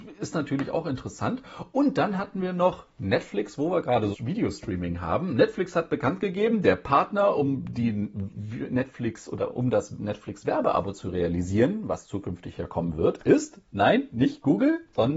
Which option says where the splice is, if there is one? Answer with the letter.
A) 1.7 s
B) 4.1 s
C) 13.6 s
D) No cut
B